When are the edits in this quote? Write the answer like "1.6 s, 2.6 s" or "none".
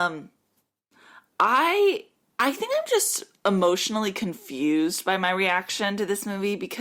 none